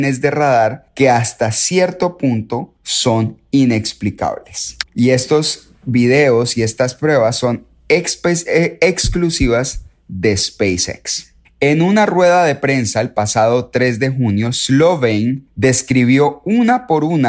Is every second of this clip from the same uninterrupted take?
no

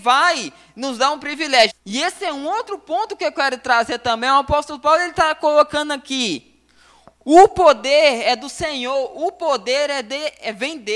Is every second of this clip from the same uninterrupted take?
no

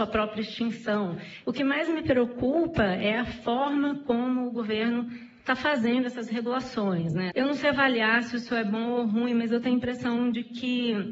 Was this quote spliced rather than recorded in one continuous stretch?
yes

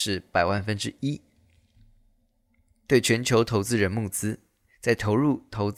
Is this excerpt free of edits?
no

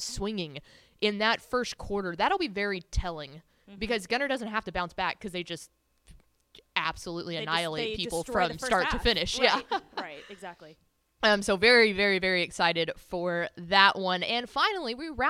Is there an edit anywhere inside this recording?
no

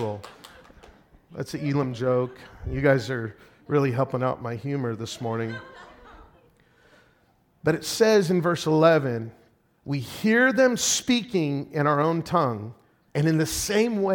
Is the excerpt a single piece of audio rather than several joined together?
no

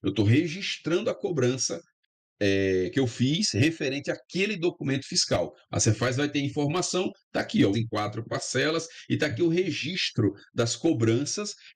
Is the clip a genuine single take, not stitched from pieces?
no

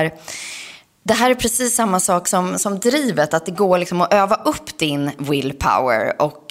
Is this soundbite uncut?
yes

